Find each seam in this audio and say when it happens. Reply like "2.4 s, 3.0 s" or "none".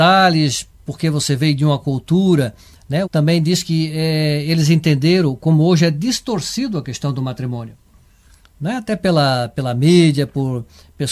3.0 s